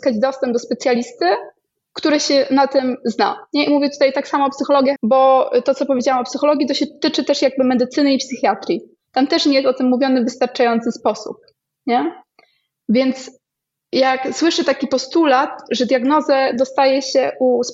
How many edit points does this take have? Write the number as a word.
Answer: one